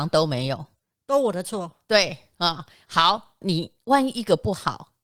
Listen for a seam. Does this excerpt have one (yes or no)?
yes